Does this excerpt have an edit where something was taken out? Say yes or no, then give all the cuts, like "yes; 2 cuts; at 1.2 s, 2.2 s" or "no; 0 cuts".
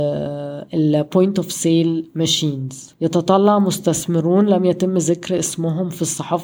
yes; 1 cut; at 2.9 s